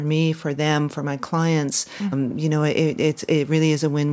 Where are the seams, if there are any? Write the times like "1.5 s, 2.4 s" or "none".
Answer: 2.1 s

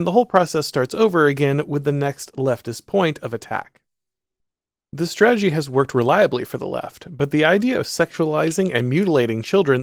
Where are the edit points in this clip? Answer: none

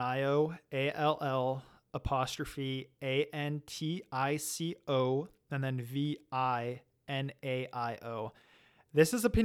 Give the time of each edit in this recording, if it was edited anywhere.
none

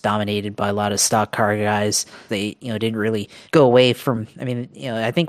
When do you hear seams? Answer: 2.3 s, 3.4 s

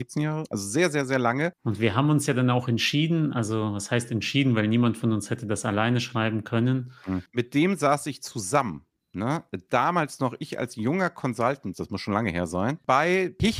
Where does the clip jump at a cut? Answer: 1.5 s, 7.3 s, 11.7 s

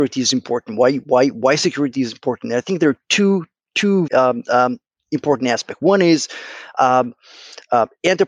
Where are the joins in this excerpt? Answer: 4.1 s

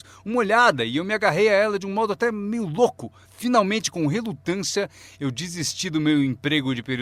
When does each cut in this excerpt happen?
3.2 s

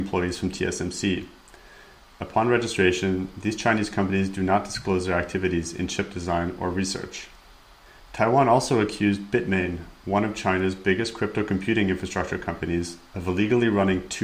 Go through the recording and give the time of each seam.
8.0 s

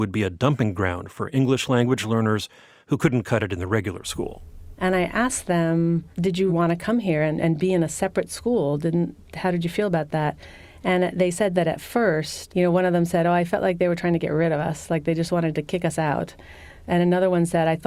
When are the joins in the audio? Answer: 6.5 s

